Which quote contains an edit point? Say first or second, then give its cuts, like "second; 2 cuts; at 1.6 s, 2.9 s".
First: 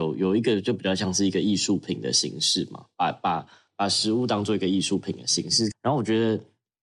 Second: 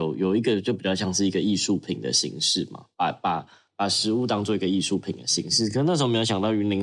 first; 1 cut; at 5.7 s